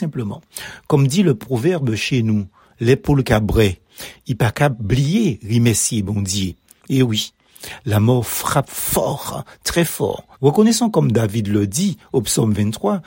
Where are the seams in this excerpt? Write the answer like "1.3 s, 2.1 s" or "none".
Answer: 6.8 s, 10.3 s